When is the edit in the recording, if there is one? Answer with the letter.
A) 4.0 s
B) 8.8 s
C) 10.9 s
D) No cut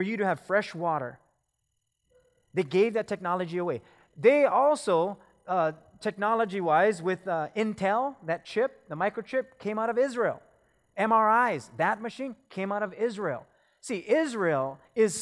C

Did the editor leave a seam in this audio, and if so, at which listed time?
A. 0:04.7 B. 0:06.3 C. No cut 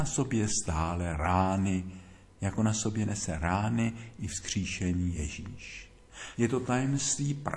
B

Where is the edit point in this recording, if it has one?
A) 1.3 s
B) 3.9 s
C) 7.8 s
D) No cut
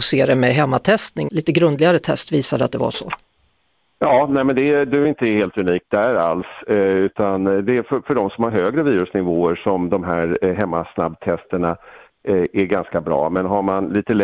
A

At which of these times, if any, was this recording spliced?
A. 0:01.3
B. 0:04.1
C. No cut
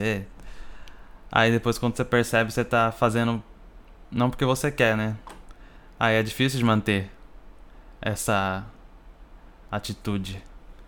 C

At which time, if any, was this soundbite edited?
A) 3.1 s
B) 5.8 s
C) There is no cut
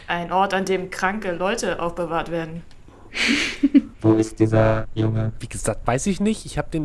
A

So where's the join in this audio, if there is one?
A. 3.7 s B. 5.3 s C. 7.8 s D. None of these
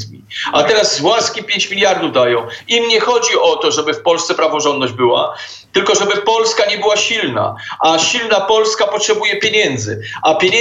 D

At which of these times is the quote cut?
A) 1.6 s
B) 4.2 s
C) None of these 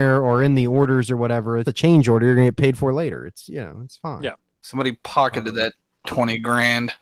A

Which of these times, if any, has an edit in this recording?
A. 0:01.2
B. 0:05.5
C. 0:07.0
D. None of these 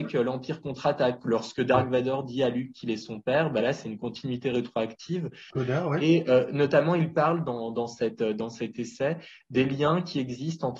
B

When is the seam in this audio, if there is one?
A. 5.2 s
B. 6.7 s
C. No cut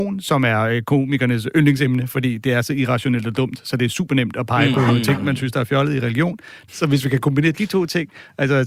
B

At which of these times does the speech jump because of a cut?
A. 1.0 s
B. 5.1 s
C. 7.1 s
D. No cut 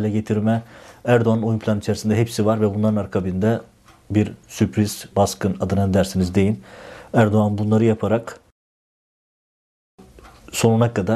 B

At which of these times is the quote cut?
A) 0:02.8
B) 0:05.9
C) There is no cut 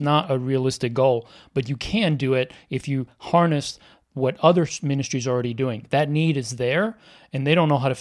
C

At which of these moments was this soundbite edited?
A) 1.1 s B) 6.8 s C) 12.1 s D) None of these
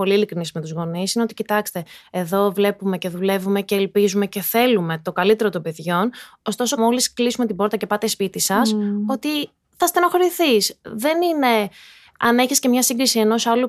B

